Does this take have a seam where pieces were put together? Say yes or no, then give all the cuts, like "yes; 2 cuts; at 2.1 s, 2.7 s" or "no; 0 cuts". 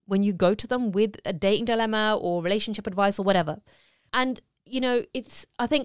yes; 1 cut; at 4.1 s